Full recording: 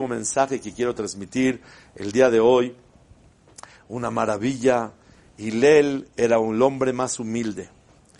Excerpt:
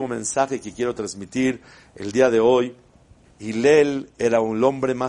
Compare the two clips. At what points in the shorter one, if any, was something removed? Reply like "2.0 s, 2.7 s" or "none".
3.3 s